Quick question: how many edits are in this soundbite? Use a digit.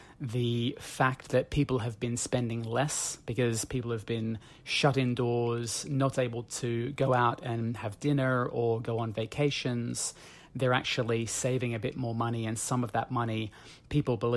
0